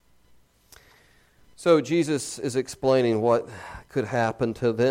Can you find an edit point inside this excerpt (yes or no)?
no